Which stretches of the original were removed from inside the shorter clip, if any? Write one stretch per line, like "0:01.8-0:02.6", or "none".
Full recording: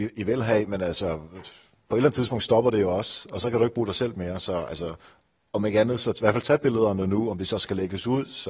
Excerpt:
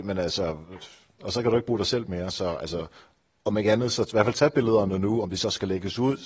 0:01.8-0:03.3